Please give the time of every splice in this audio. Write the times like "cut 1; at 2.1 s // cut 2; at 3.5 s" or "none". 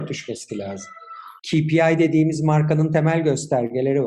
cut 1; at 1.4 s